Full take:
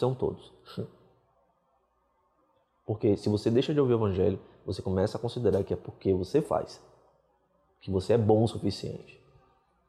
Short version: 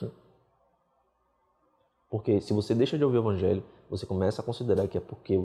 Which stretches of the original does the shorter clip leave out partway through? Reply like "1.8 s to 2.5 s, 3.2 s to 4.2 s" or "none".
none